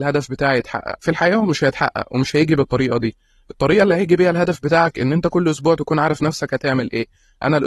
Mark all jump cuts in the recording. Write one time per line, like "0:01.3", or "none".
0:01.0